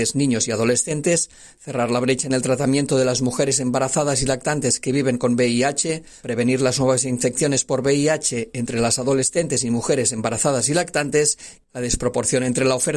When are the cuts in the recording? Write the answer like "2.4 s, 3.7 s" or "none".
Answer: 11.6 s